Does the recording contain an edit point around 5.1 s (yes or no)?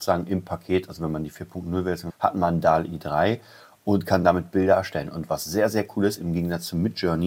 no